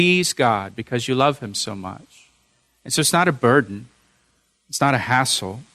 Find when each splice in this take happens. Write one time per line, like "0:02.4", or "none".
none